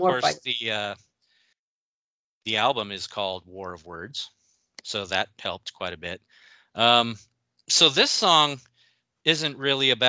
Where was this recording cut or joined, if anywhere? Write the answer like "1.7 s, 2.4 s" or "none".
none

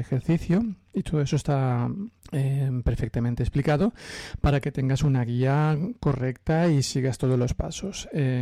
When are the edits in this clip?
2.2 s

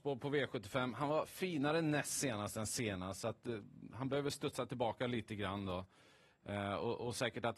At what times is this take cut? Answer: none

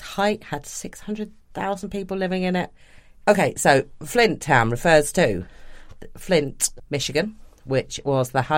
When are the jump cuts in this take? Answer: 3.2 s

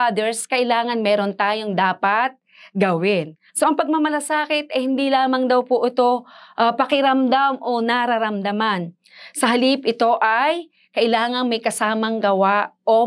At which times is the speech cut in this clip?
3.5 s

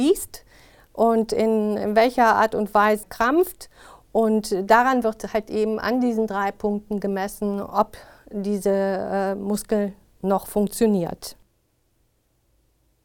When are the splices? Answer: 3.0 s

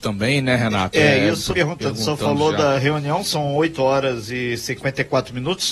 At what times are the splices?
1.5 s

